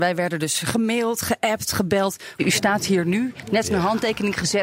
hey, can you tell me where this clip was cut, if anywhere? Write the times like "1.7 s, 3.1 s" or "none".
2.4 s